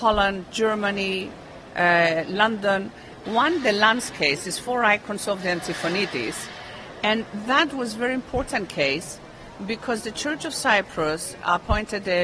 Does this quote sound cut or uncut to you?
cut